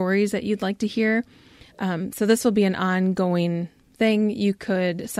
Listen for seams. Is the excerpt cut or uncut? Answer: cut